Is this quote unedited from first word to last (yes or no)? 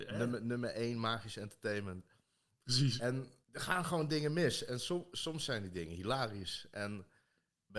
no